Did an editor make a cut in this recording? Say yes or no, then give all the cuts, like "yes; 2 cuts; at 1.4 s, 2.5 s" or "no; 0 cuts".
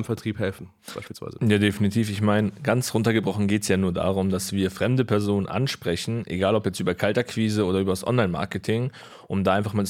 no; 0 cuts